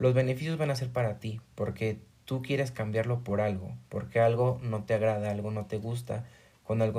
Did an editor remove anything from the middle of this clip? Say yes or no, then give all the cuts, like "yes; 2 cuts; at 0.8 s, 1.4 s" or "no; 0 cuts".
no; 0 cuts